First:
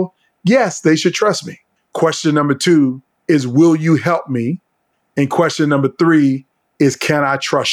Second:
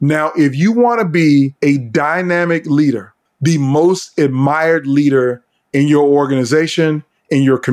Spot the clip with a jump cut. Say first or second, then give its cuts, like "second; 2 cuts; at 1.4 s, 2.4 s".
first; 1 cut; at 1.8 s